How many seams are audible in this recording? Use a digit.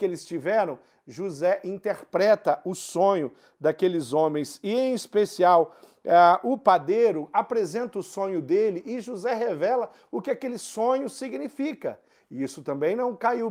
0